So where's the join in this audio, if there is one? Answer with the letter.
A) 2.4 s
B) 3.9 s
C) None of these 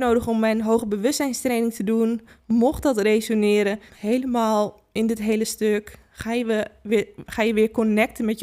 B